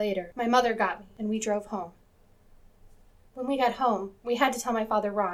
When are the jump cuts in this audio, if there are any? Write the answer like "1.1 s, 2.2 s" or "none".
3.2 s